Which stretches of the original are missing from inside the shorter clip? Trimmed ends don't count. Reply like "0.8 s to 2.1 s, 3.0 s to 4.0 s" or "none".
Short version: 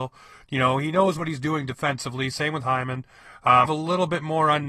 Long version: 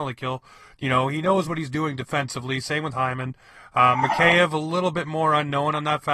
4.0 s to 4.5 s